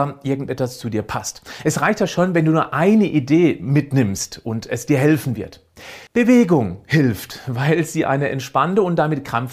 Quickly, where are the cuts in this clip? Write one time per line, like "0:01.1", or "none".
0:06.1